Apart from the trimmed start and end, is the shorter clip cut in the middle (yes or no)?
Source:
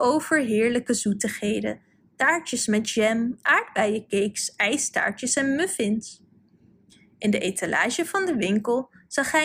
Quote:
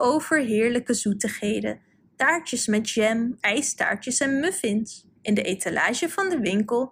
yes